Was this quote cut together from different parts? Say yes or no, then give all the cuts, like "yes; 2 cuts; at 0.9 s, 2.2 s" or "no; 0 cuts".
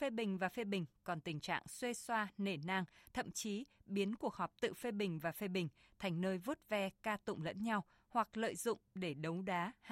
no; 0 cuts